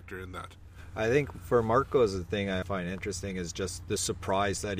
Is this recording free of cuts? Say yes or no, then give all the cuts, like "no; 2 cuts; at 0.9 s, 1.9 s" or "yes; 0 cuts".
no; 1 cut; at 2.6 s